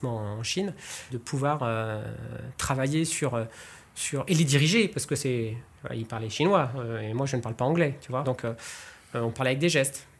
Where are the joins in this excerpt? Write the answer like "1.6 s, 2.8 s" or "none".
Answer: 1.1 s, 8.2 s